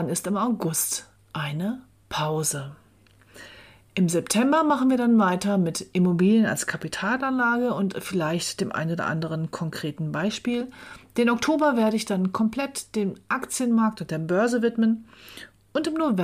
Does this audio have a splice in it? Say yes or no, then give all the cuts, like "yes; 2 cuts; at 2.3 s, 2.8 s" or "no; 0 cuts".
no; 0 cuts